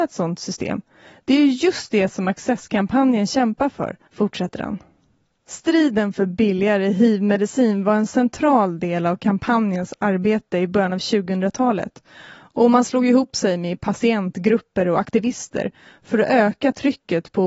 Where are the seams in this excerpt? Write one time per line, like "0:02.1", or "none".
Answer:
0:04.1